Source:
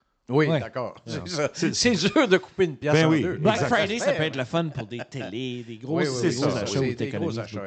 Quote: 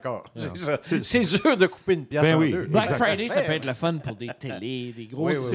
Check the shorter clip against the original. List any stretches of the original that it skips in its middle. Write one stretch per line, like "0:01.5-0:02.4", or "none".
none